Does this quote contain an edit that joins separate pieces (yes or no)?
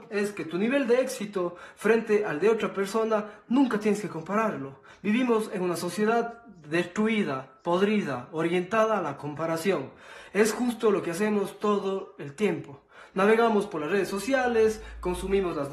no